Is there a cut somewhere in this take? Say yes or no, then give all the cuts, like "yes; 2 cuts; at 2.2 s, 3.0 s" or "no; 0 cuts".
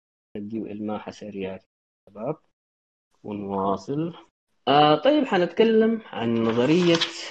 no; 0 cuts